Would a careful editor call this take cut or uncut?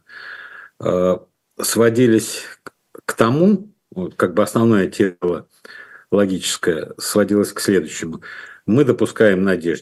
uncut